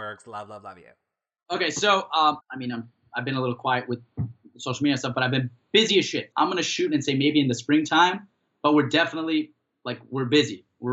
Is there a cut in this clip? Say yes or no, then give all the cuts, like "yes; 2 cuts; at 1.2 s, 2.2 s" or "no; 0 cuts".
yes; 2 cuts; at 2.4 s, 6.3 s